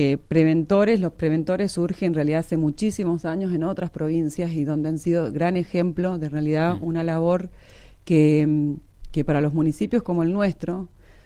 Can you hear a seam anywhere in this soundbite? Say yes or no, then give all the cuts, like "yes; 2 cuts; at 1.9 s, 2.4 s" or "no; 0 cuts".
no; 0 cuts